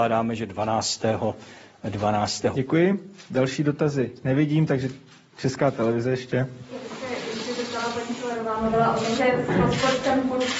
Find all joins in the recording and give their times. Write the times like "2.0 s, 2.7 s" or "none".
2.5 s, 9.2 s